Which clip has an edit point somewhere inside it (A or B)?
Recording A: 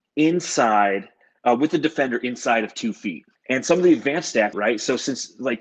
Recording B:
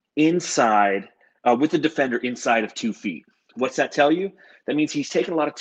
A